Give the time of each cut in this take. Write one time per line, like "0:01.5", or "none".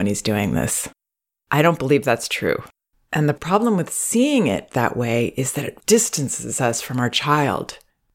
0:02.9
0:05.8